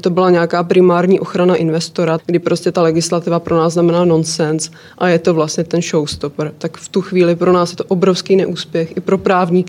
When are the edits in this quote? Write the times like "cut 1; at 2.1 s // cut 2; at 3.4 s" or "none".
cut 1; at 2.2 s